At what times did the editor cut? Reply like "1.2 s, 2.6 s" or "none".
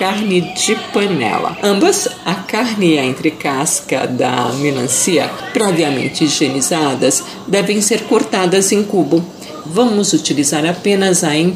9.6 s